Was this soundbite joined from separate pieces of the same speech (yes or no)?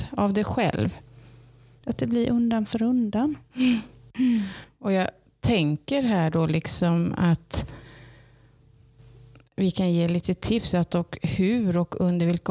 yes